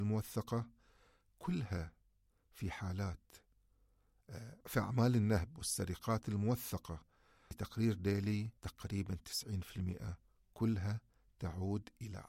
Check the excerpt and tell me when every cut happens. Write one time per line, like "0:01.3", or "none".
0:04.6
0:08.6